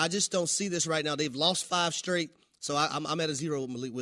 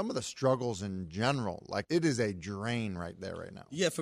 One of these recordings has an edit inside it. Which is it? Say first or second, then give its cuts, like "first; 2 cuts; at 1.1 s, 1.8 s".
second; 1 cut; at 1.8 s